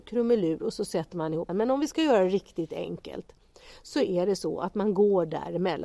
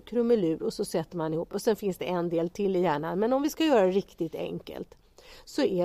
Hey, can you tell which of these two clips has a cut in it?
first; 1 cut; at 1.5 s

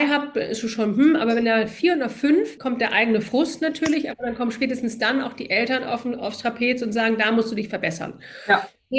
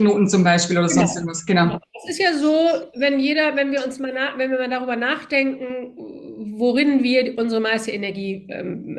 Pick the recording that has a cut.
first; 1 cut; at 2.6 s

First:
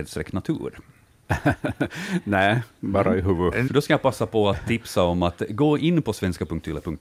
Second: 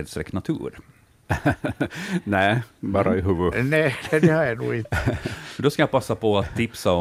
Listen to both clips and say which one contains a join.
first; 1 cut; at 3.7 s

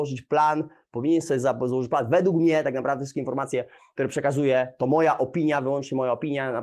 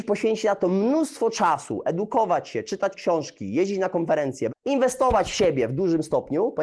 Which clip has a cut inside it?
second; 1 cut; at 4.5 s

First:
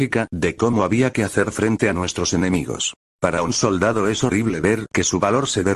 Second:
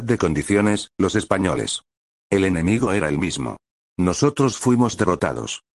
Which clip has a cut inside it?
second; 1 cut; at 3.9 s

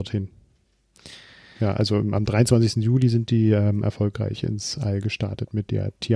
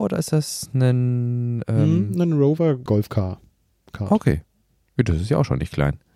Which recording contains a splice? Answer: second; 1 cut; at 2.9 s

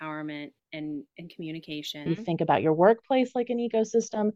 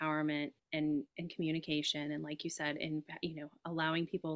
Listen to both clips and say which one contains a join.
first; 1 cut; at 2.1 s

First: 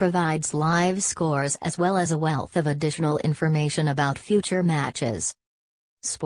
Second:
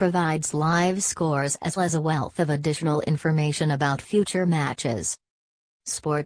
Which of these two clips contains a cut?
second; 1 cut; at 1.8 s

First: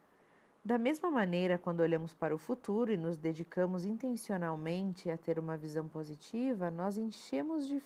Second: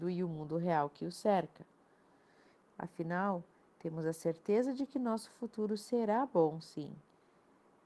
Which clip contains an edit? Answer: second; 1 cut; at 2.6 s

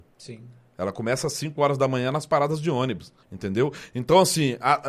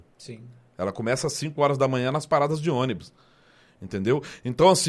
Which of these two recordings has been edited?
first; 1 cut; at 3.2 s

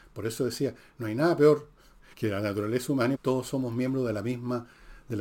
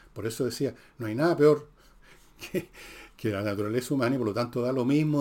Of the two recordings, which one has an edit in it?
first; 2 cuts; at 2.1 s, 3.1 s

